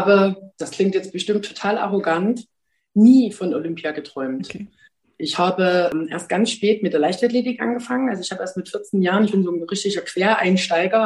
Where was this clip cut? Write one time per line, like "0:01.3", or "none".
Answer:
none